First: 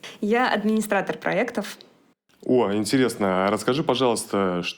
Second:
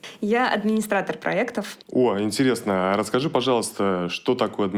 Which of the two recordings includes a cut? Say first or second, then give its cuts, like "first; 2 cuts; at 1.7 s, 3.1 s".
second; 1 cut; at 1.8 s